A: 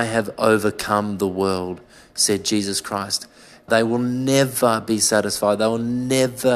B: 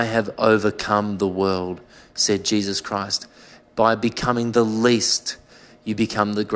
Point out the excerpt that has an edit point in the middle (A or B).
A